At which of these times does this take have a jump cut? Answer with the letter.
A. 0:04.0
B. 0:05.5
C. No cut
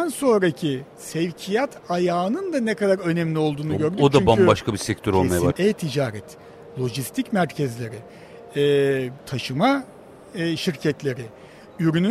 B